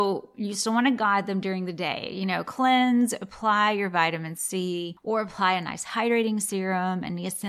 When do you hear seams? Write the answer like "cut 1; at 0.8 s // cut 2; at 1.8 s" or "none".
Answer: none